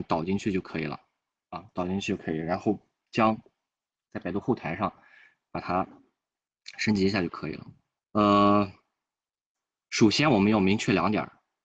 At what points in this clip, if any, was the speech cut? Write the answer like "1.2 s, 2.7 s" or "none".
8.0 s

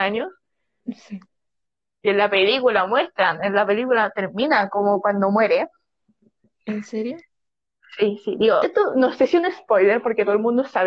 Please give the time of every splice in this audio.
8.6 s

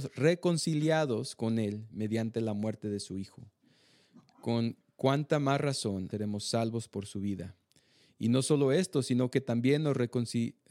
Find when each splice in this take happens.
6.1 s

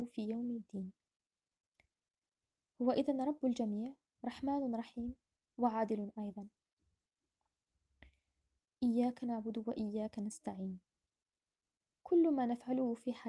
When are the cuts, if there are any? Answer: none

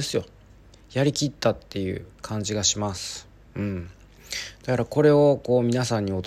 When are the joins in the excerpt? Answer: 2.1 s

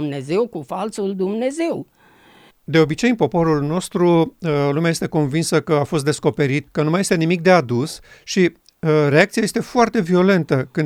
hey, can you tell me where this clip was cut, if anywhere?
2.5 s, 6.7 s

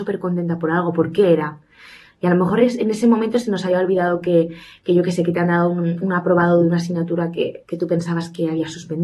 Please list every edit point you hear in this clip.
none

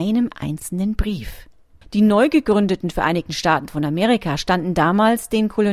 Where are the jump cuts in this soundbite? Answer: 1.8 s

